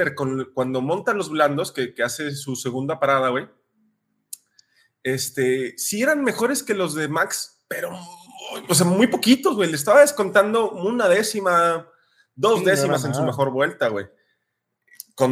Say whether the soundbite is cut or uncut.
uncut